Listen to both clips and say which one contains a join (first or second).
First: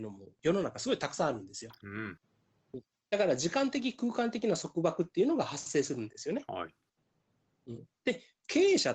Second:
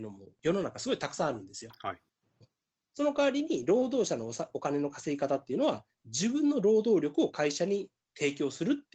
first